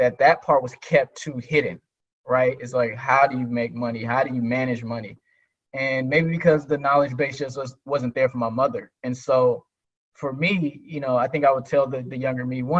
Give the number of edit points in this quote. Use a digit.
0